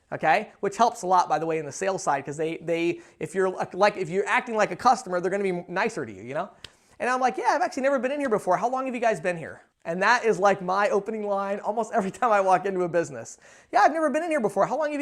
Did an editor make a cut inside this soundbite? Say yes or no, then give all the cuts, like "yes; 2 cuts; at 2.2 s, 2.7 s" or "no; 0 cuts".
yes; 1 cut; at 9.7 s